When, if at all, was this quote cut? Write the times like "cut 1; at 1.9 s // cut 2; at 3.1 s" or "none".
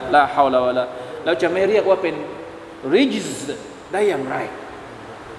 none

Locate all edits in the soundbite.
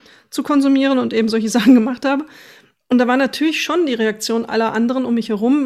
none

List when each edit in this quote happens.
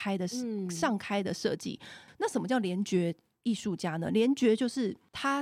cut 1; at 2.1 s

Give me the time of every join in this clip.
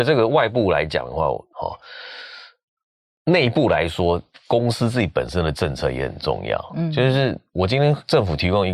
cut 1; at 1.5 s

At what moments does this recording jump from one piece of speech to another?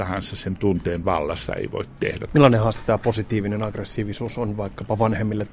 cut 1; at 2.3 s

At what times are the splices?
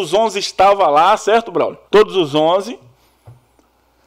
cut 1; at 1.8 s

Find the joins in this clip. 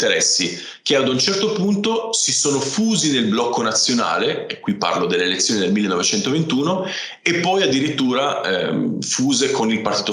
none

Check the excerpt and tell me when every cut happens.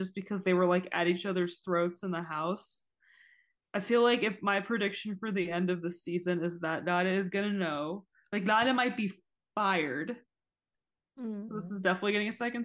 cut 1; at 3.6 s // cut 2; at 11.5 s

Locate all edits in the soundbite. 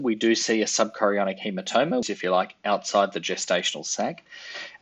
cut 1; at 2.0 s

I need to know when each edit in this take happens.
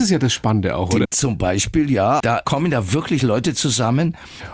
cut 1; at 1.0 s // cut 2; at 2.2 s

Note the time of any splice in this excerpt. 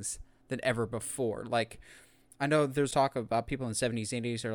cut 1; at 2.9 s

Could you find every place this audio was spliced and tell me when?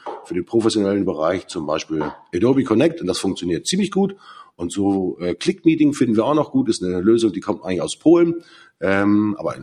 none

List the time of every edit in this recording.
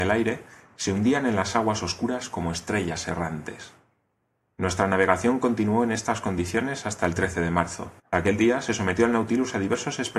cut 1; at 8.0 s

